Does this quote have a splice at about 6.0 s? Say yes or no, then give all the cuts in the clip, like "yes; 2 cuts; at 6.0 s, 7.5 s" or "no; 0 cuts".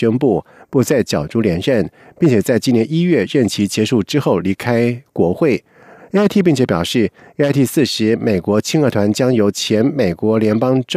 yes; 1 cut; at 6.0 s